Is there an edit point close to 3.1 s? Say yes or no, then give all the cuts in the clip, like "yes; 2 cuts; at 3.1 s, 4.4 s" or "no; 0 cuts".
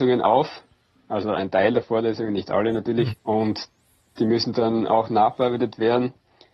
yes; 1 cut; at 3.1 s